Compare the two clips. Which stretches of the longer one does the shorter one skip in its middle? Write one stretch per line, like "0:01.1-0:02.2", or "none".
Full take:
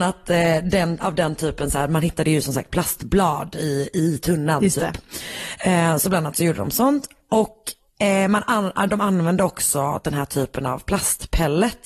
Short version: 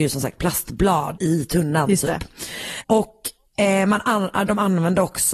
0:03.5-0:03.9
0:05.6-0:07.2